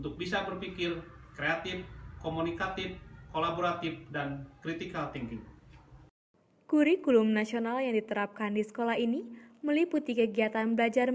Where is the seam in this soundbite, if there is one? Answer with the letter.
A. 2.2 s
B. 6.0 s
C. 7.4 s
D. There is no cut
D